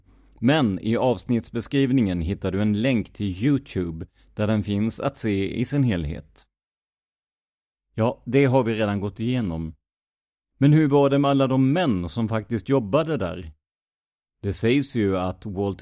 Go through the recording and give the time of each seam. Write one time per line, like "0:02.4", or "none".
0:07.7